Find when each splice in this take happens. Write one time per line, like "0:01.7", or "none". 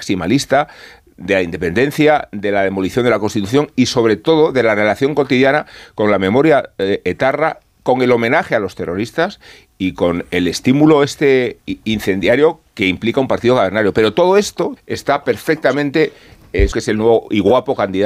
0:14.8
0:16.7